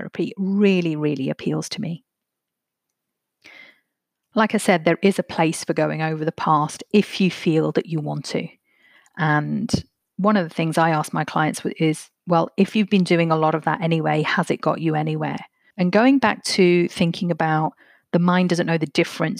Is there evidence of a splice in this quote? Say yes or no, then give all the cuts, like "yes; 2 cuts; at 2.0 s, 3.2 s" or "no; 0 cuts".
yes; 1 cut; at 15.7 s